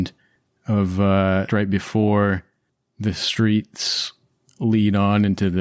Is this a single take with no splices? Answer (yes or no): no